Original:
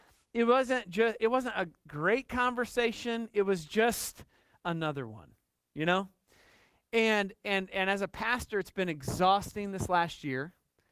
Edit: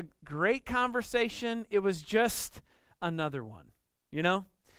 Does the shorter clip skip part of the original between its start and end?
no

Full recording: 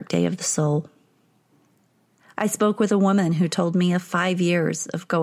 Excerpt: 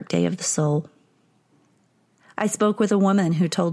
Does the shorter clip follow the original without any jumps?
yes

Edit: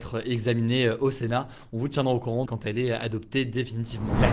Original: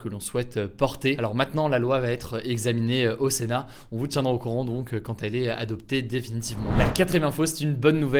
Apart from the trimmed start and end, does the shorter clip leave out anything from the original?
yes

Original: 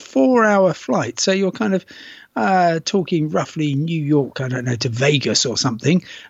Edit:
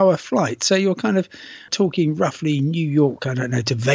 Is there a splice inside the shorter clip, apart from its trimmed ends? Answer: yes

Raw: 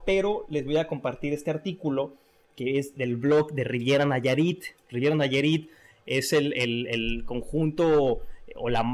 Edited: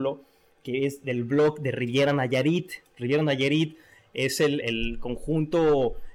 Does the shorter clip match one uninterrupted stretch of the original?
no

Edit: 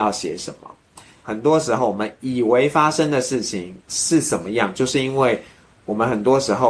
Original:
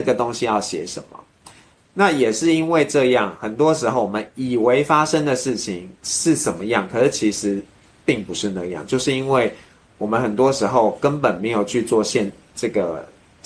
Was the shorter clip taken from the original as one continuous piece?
no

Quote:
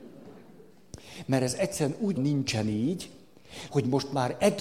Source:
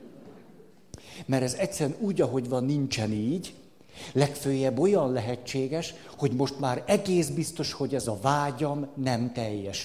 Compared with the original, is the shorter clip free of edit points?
no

